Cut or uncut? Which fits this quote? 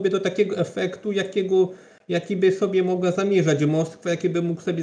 uncut